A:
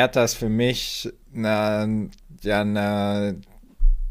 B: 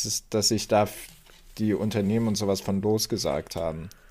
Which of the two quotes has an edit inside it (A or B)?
A